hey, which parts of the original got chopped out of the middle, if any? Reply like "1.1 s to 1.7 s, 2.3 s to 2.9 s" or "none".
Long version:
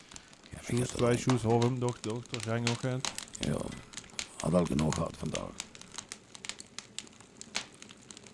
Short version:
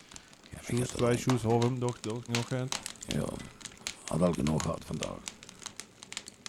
2.3 s to 2.6 s